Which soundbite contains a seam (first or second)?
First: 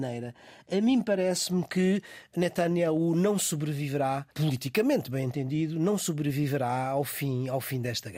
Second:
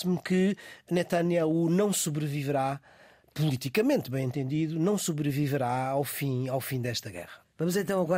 first